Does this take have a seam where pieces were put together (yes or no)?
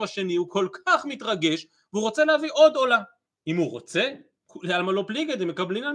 yes